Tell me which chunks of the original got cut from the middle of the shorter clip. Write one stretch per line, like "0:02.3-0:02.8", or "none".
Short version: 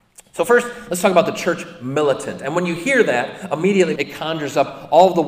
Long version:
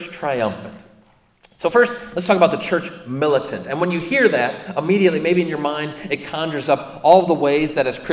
0:05.2-0:06.1

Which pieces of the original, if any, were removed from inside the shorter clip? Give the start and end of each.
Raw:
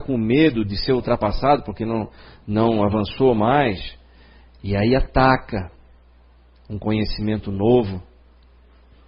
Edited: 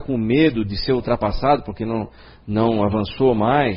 none

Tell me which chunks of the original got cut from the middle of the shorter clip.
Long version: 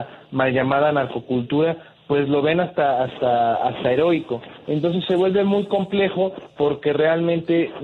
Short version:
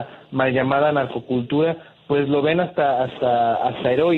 none

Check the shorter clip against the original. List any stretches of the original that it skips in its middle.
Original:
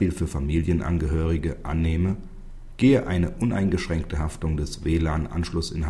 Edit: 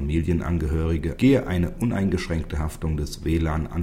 0:01.6-0:02.8

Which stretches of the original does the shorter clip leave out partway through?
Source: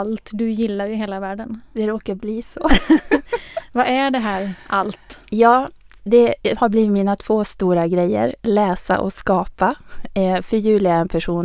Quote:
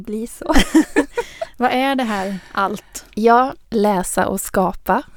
0:05.8-0:08.4

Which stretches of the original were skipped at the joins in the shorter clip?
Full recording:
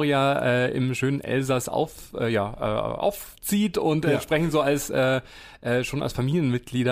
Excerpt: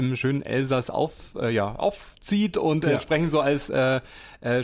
0:02.6-0:03.0

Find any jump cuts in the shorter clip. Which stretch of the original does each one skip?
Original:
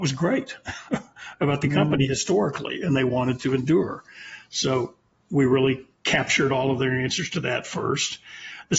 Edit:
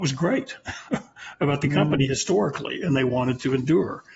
none

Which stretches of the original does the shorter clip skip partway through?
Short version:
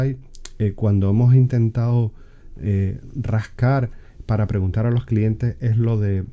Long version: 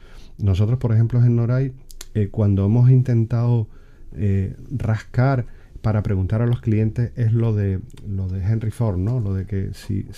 none

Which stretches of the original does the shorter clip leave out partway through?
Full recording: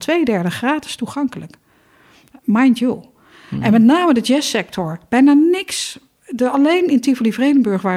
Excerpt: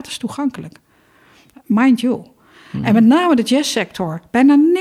none

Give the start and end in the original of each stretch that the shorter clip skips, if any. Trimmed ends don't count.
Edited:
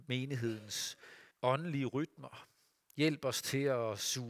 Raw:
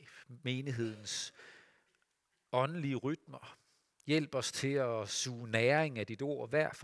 0:01.7-0:02.4

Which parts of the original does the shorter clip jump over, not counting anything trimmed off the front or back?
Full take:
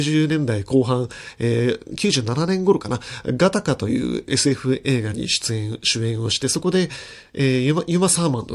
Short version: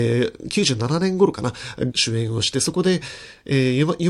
0:03.4-0:05.8

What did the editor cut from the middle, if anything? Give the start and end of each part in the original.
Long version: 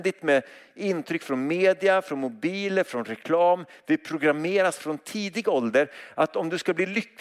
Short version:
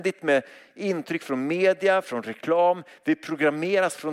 0:02.0-0:02.8

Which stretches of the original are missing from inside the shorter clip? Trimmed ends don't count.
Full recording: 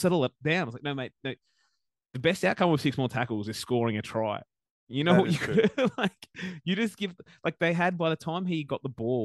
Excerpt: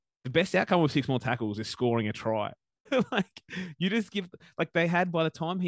0:04.7-0:05.7

